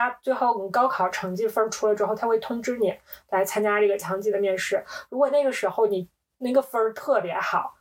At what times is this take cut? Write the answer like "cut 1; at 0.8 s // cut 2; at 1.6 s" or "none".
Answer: none

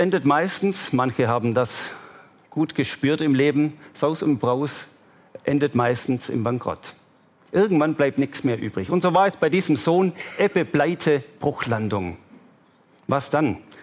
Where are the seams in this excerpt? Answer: none

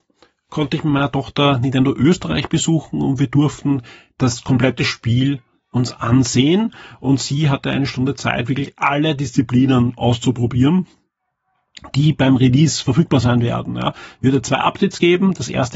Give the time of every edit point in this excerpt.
none

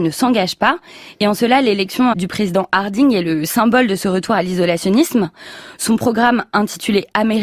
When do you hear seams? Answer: cut 1; at 2.1 s

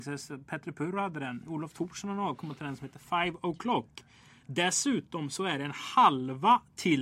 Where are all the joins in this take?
none

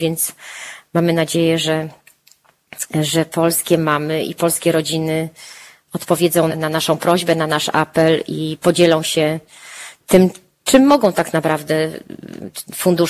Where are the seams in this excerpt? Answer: cut 1; at 6.5 s // cut 2; at 10.0 s

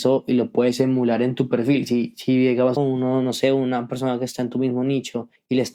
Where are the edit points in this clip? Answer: cut 1; at 2.8 s

